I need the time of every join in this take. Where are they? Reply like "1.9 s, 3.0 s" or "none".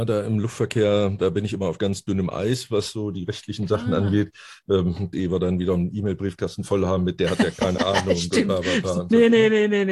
5.1 s